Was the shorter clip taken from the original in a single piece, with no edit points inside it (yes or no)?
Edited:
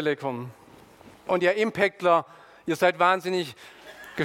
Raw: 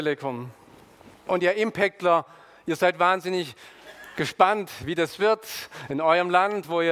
yes